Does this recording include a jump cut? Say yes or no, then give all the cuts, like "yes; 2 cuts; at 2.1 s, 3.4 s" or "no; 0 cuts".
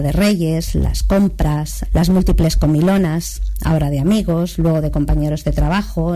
yes; 1 cut; at 1.9 s